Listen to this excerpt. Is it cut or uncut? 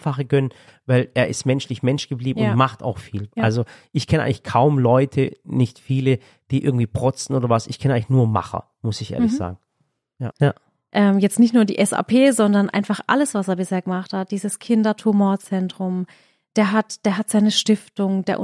cut